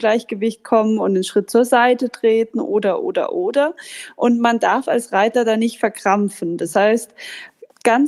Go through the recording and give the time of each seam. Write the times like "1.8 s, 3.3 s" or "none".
none